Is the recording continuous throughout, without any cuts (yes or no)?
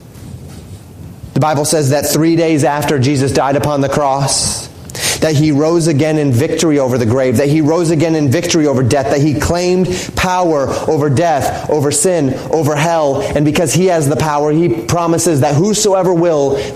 no